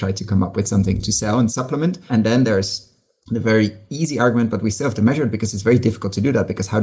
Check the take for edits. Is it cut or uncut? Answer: cut